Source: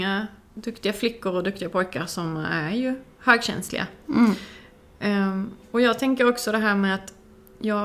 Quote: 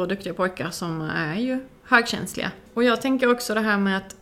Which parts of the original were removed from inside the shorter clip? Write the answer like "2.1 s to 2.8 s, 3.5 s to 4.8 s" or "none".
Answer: 4.0 s to 5.6 s